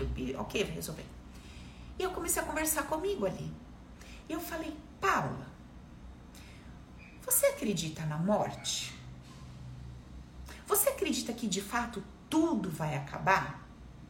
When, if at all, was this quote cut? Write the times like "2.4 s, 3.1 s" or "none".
none